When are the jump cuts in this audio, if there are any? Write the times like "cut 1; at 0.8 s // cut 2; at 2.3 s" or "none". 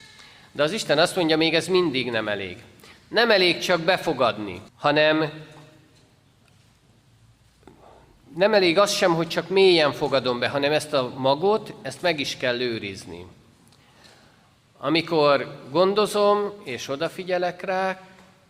cut 1; at 4.7 s